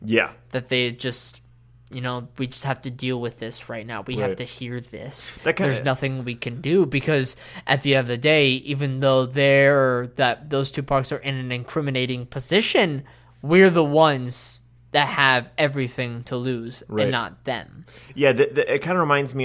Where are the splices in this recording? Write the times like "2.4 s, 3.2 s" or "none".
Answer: none